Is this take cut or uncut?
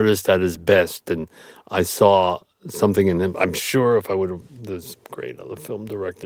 uncut